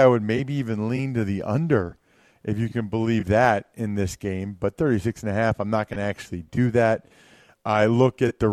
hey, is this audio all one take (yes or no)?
yes